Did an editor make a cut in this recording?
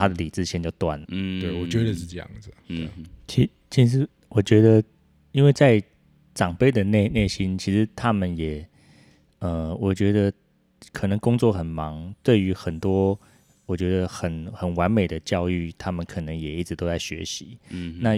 yes; 1 cut; at 1.1 s

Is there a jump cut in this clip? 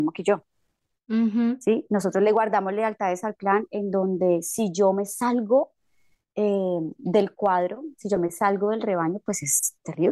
no; 0 cuts

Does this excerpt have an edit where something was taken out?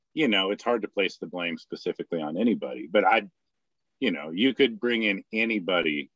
no; 0 cuts

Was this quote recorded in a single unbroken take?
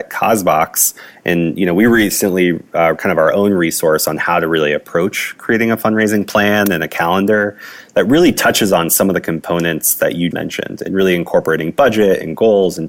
no; 2 cuts; at 2.9 s, 10.3 s

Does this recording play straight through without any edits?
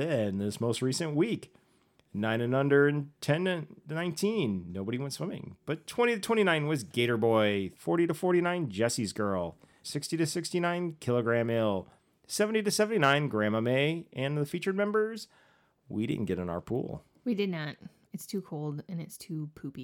no; 2 cuts; at 7.7 s, 9.8 s

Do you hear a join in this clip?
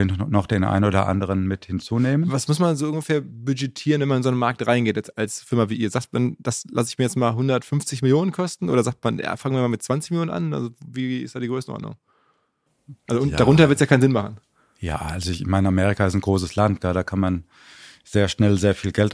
no; 0 cuts

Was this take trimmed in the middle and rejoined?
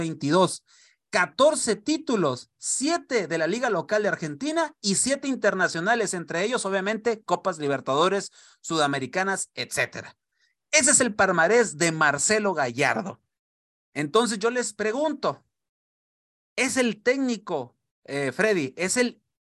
no; 0 cuts

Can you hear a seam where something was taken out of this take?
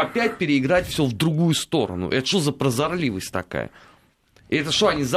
no; 0 cuts

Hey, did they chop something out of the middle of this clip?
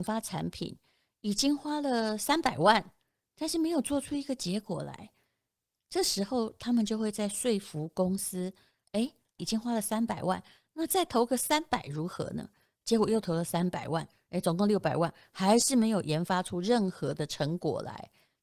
yes; 1 cut; at 9.4 s

